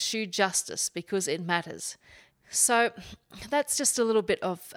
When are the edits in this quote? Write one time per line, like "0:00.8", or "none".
0:02.3